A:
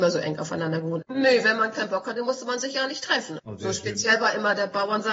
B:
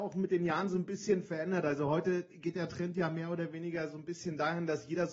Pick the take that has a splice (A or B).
A